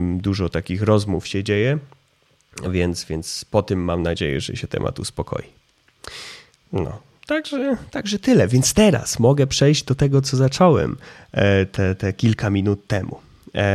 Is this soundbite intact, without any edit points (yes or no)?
yes